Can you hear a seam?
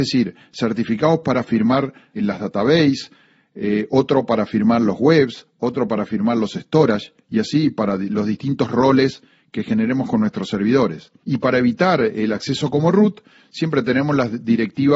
yes; 2 cuts; at 2.2 s, 11.2 s

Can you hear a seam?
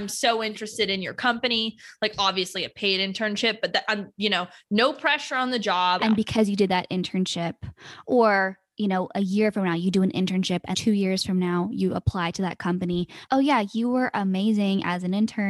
yes; 3 cuts; at 6.0 s, 10.7 s, 13.3 s

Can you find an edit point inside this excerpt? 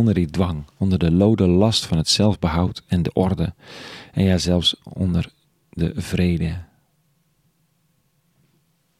no; 0 cuts

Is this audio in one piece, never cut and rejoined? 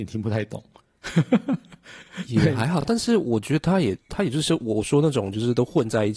yes; 0 cuts

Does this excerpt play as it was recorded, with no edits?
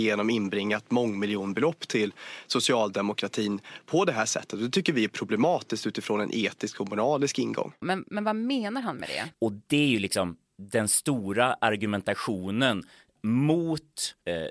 no; 2 cuts; at 7.8 s, 9.3 s

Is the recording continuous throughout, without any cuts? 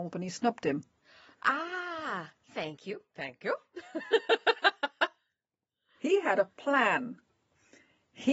yes; 0 cuts

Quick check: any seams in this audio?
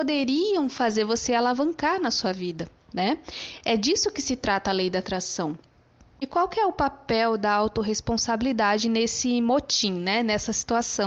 no; 0 cuts

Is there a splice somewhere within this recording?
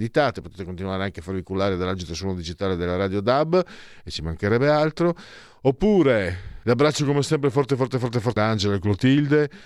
yes; 2 cuts; at 6.6 s, 8.4 s

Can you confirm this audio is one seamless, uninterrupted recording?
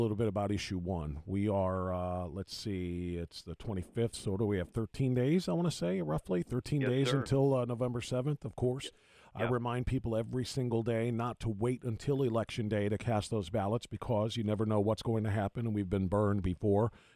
yes; 0 cuts

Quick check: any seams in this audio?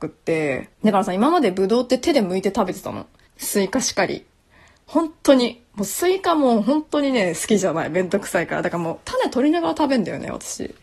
yes; 1 cut; at 3.3 s

